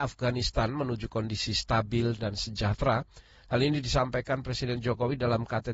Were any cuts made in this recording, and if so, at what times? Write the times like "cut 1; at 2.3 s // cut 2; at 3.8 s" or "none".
cut 1; at 2.2 s